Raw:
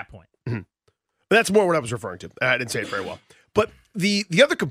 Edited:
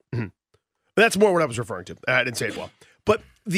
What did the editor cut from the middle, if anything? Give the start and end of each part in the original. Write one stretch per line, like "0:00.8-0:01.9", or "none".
0:02.9-0:03.0